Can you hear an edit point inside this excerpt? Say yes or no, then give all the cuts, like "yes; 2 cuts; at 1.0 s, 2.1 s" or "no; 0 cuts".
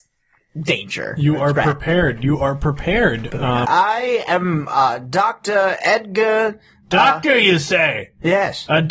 yes; 1 cut; at 3.6 s